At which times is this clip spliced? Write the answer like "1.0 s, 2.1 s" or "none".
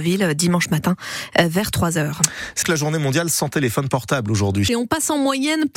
2.6 s, 4.7 s